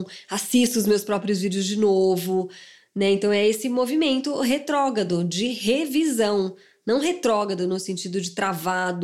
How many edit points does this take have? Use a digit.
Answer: 0